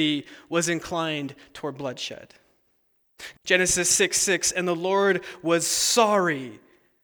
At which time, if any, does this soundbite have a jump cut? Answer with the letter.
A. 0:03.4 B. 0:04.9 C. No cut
A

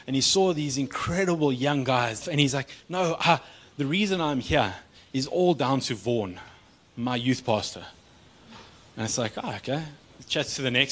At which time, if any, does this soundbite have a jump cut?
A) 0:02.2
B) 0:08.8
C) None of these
A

